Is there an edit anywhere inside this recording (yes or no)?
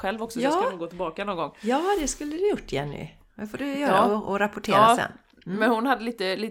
no